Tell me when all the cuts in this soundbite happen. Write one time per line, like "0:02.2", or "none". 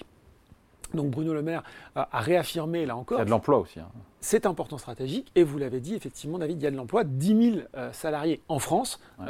none